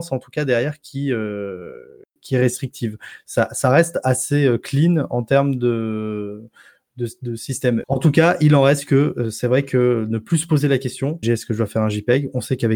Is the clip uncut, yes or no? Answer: no